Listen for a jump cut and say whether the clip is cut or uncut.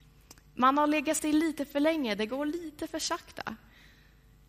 uncut